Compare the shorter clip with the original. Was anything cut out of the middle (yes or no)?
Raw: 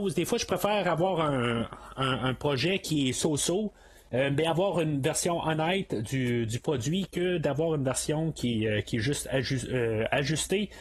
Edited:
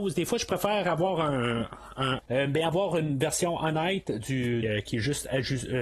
yes